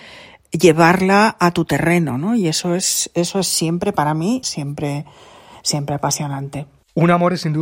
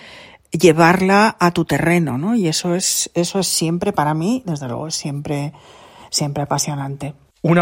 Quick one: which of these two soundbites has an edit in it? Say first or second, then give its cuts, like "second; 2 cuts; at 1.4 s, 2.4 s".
first; 1 cut; at 4.4 s